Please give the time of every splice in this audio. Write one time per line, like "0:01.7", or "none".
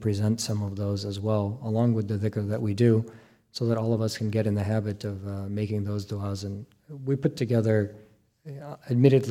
none